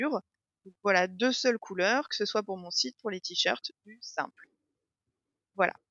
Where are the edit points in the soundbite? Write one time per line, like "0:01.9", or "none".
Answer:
none